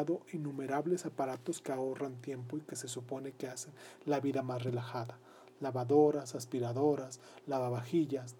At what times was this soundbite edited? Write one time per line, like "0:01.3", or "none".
none